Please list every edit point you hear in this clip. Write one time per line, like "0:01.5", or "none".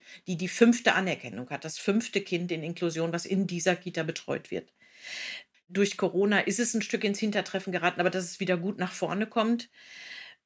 0:05.5